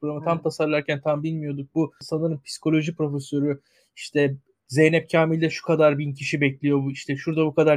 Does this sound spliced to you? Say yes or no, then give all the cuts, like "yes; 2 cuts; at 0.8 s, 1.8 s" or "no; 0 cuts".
no; 0 cuts